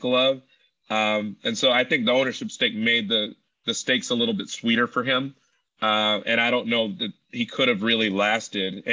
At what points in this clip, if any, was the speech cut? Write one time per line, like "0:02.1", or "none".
none